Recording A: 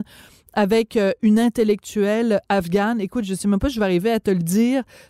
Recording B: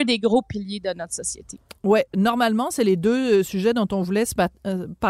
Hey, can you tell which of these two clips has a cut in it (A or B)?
B